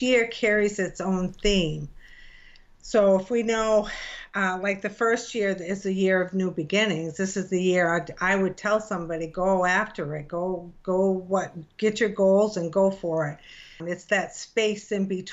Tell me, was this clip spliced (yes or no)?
yes